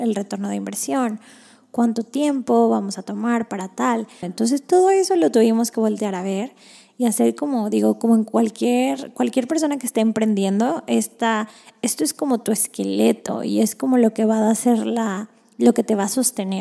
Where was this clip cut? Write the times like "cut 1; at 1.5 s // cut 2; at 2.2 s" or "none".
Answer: cut 1; at 4.2 s

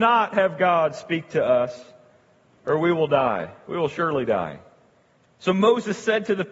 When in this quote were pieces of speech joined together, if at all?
none

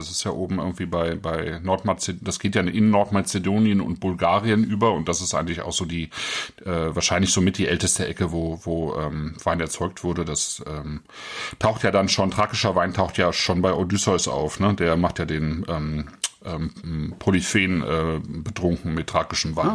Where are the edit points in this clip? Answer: none

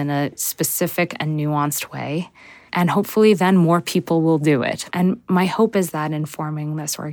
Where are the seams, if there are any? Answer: cut 1; at 2.7 s // cut 2; at 4.9 s

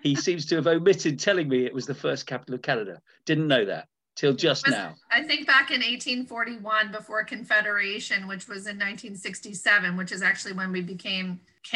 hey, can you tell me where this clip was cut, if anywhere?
none

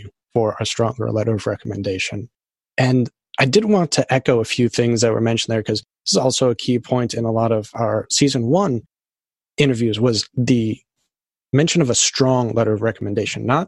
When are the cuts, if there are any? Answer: cut 1; at 2.6 s

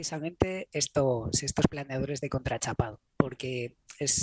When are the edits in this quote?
cut 1; at 3.1 s

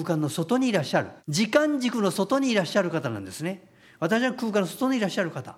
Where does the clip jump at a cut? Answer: cut 1; at 1.2 s

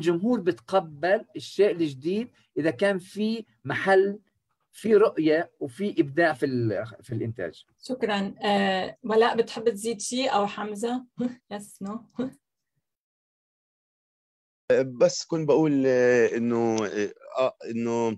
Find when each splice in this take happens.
cut 1; at 7.8 s // cut 2; at 11.4 s

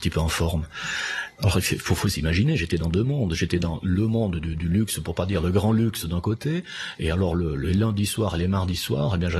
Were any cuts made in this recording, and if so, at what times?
none

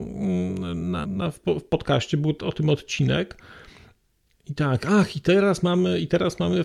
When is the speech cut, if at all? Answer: cut 1; at 1.0 s // cut 2; at 4.4 s

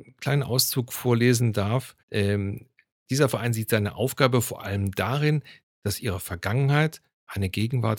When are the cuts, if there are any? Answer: cut 1; at 2.0 s // cut 2; at 5.6 s

